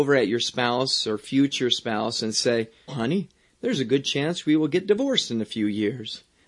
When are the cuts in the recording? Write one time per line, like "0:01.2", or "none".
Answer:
0:02.9

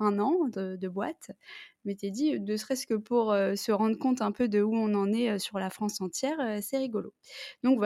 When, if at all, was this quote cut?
none

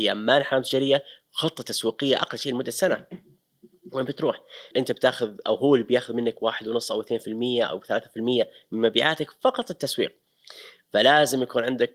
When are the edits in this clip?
0:04.7

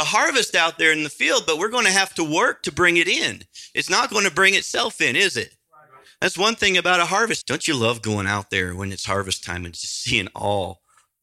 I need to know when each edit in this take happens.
0:07.4

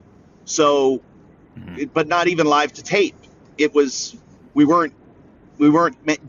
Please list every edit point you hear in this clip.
none

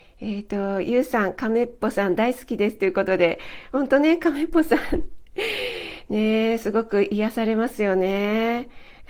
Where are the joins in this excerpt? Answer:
none

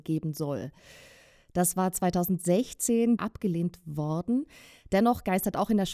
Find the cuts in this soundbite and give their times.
0:03.2

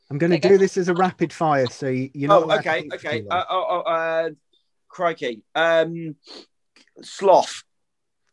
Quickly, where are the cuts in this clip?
none

